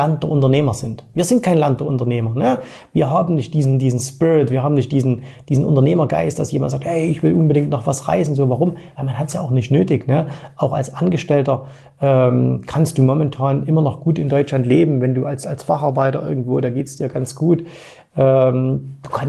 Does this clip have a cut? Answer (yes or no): no